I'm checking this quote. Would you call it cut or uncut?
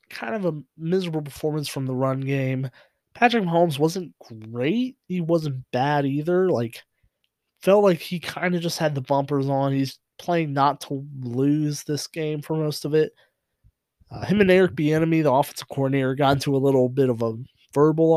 uncut